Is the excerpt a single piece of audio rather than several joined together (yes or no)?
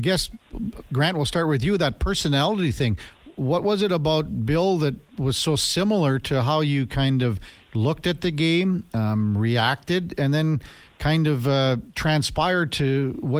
yes